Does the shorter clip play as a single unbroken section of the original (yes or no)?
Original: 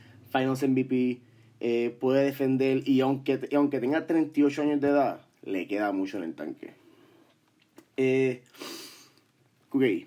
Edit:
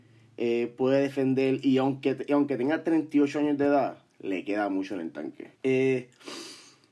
no